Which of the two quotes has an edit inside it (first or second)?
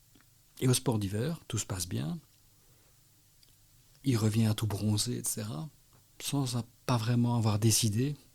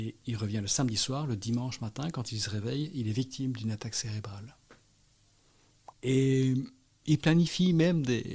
second